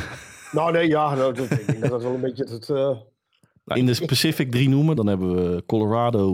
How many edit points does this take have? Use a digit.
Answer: 2